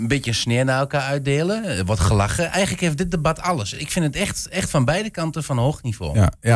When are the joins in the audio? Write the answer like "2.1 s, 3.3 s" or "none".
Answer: none